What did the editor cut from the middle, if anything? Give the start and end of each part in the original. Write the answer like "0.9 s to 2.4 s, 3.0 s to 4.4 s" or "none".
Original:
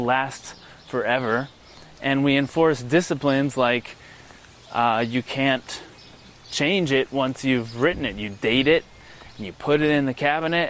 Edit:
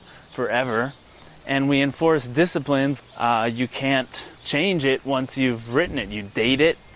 3.5 s to 4.5 s, 5.9 s to 6.4 s